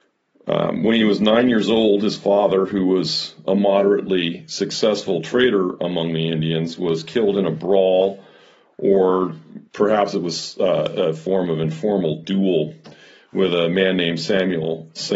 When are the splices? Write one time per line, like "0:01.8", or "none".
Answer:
0:09.7